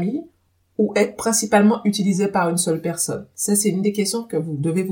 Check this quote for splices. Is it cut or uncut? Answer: uncut